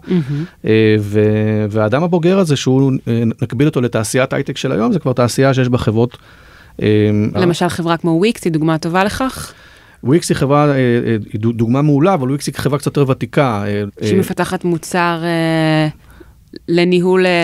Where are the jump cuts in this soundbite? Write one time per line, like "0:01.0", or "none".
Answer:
0:07.3
0:13.9